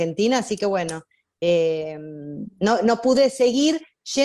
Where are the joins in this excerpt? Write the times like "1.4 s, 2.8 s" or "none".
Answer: none